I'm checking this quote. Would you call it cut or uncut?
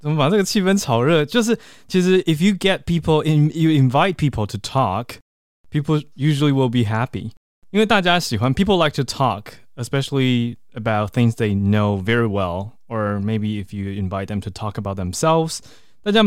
uncut